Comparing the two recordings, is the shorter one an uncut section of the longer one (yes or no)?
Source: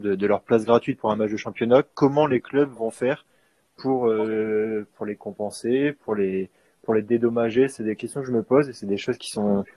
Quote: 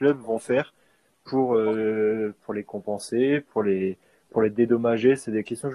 yes